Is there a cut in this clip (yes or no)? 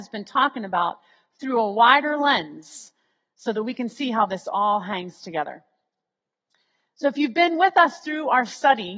no